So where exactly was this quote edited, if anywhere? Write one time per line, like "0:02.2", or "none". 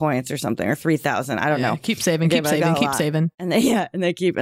0:03.3